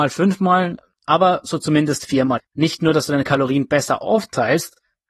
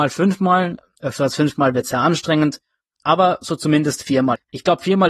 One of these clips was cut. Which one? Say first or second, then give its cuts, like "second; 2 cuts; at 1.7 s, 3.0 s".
first; 2 cuts; at 0.9 s, 2.5 s